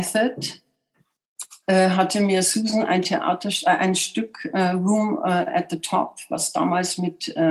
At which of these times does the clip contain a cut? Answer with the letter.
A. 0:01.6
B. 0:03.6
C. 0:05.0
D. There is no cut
D